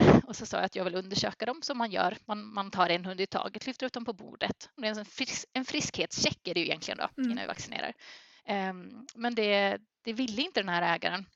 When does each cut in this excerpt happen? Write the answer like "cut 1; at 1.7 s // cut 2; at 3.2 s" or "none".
cut 1; at 4.8 s